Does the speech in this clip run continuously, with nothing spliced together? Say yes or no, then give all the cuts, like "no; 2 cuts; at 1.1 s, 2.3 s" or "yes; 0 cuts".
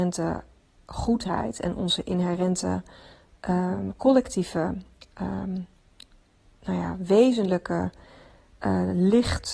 yes; 0 cuts